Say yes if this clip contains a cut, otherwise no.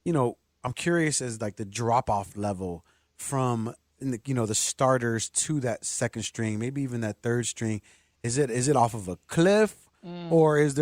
no